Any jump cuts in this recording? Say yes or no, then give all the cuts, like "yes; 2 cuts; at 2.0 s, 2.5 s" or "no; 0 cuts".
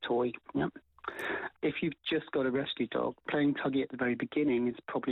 yes; 2 cuts; at 1.5 s, 3.2 s